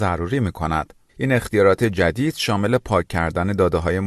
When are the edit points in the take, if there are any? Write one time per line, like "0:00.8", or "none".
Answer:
0:01.1